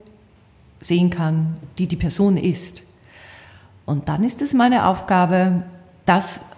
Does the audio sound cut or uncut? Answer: uncut